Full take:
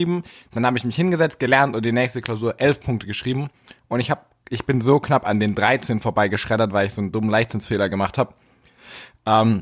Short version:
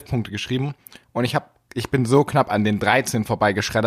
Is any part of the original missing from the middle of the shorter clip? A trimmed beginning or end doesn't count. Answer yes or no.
no